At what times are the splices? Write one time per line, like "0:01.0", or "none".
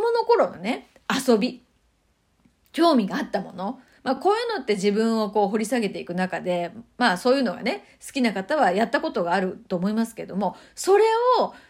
none